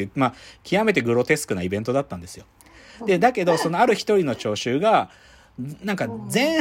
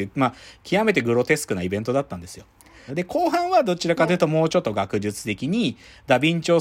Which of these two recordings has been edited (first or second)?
second